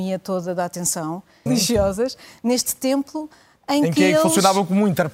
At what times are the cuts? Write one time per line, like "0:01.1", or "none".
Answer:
0:01.5

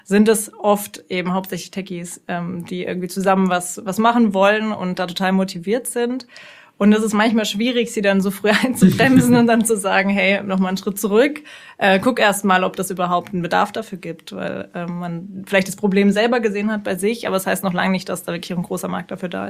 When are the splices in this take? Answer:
none

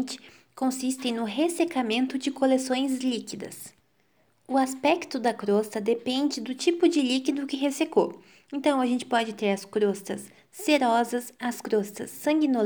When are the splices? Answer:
none

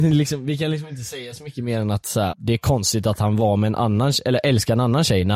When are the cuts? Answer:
0:02.3

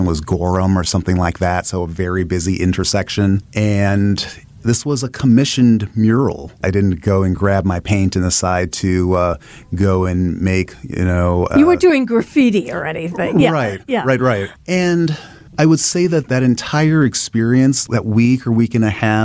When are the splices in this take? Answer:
none

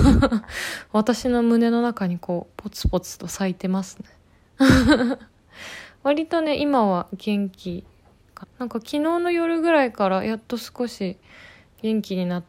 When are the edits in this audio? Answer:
0:08.4

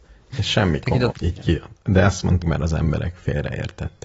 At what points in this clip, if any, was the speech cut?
0:01.1
0:02.4

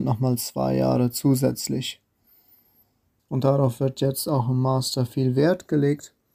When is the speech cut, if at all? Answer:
0:03.2

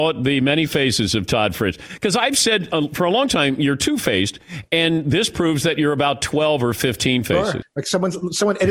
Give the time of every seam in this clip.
0:07.6

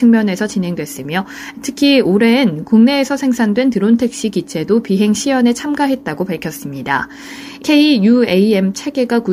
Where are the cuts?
0:07.6

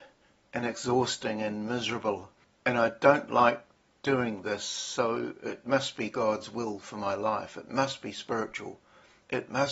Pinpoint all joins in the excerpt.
none

